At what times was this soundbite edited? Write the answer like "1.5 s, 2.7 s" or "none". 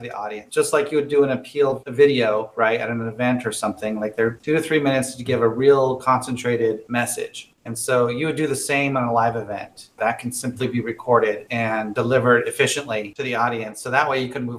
4.4 s, 10.0 s